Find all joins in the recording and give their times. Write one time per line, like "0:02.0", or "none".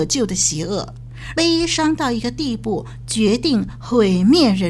0:01.3